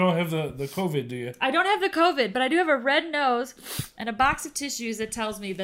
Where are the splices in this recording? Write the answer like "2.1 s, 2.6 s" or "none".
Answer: none